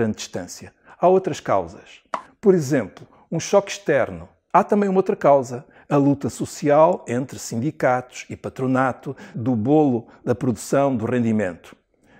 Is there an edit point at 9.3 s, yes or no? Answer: yes